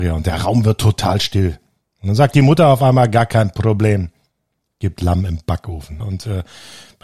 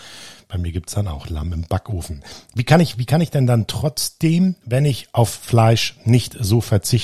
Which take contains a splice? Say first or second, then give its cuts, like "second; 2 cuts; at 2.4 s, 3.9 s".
first; 1 cut; at 6.0 s